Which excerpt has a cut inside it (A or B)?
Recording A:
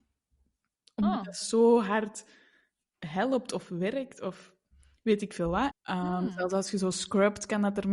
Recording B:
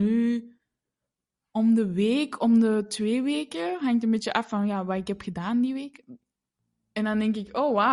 A